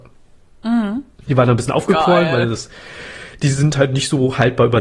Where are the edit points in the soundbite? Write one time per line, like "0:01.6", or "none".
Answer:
none